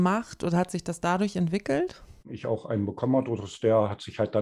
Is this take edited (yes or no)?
yes